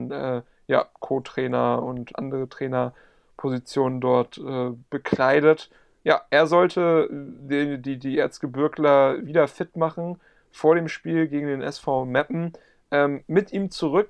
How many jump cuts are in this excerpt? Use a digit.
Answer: 1